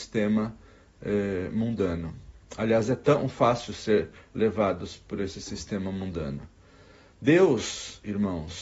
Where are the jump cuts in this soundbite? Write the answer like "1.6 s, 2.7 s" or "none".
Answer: none